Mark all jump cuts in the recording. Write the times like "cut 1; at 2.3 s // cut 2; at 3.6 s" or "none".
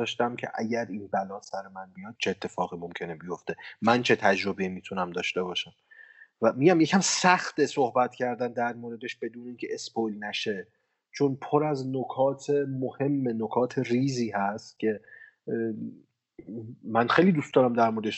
cut 1; at 2.2 s